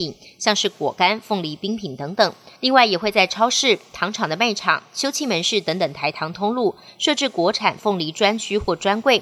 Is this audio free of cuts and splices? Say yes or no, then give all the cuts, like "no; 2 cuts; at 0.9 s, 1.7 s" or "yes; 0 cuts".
yes; 0 cuts